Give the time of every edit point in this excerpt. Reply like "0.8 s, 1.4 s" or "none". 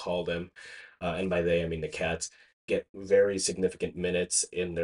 none